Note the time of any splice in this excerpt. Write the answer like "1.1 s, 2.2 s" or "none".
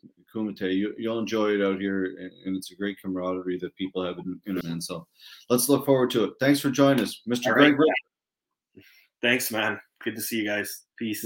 4.6 s

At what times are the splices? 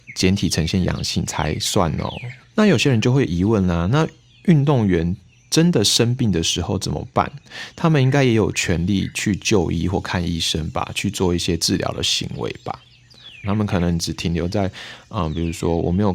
13.4 s

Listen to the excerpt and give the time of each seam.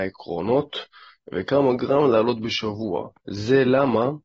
3.2 s

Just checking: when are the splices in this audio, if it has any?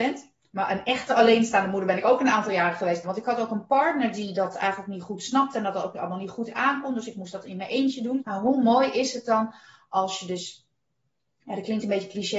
3.0 s, 8.2 s

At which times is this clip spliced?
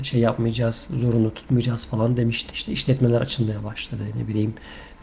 2.5 s

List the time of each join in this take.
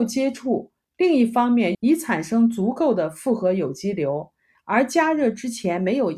1.7 s, 4.5 s

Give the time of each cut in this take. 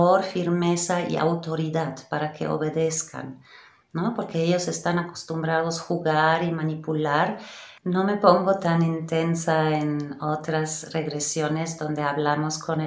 7.8 s

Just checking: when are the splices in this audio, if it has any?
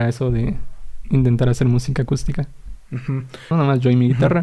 3.5 s

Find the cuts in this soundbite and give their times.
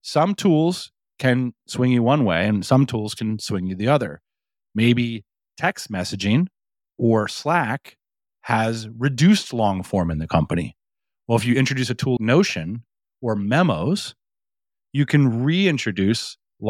12.2 s

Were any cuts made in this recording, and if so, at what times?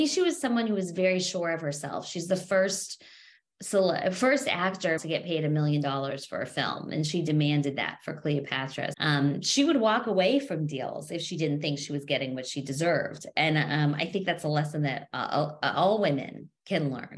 5.0 s, 8.9 s

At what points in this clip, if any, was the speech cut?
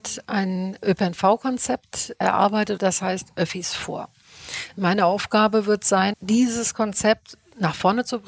2.8 s, 6.1 s

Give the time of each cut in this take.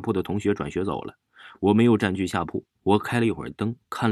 2.8 s

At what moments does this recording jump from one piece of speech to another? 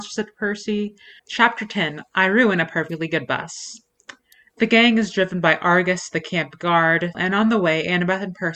1.2 s, 4.5 s, 7.1 s

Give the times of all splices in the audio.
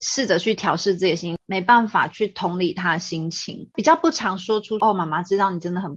1.4 s

